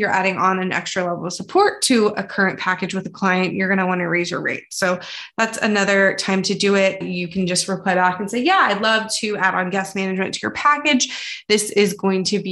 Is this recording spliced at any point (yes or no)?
no